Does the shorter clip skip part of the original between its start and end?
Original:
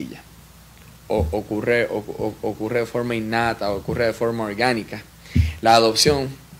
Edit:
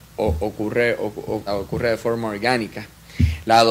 yes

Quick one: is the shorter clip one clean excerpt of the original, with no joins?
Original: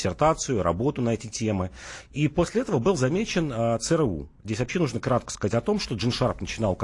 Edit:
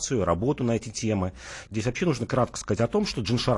no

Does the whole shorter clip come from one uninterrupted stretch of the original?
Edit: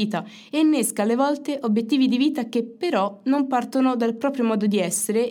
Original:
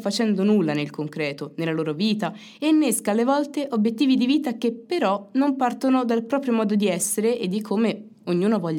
yes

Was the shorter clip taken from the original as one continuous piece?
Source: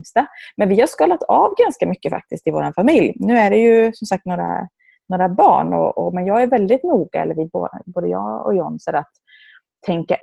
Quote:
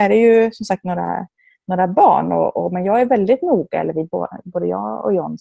yes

